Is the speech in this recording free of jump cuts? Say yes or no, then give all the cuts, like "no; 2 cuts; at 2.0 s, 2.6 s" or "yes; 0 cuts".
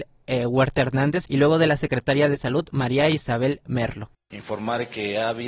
no; 1 cut; at 1.2 s